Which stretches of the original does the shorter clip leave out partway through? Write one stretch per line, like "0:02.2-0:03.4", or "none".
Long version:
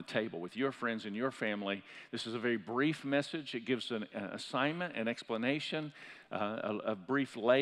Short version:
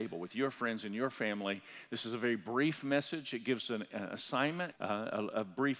0:04.9-0:06.2